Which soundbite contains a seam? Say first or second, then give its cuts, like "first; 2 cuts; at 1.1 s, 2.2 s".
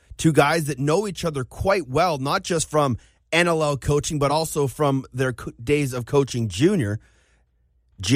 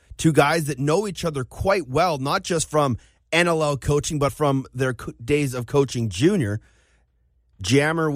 second; 1 cut; at 4.3 s